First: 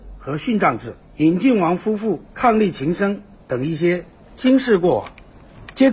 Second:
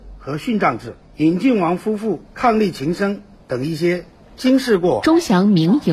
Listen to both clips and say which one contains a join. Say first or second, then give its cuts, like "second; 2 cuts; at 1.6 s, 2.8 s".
second; 1 cut; at 5.0 s